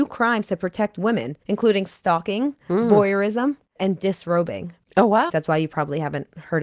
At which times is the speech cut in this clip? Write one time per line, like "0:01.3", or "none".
0:03.8
0:05.3